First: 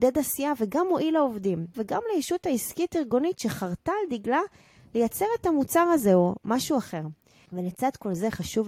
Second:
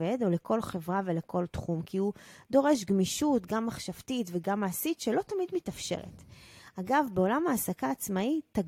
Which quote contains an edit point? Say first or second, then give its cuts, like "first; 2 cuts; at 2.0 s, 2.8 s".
first; 2 cuts; at 1.7 s, 7.5 s